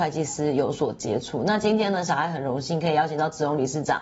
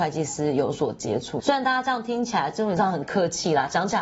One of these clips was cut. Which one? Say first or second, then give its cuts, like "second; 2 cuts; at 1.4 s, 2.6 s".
second; 1 cut; at 1.4 s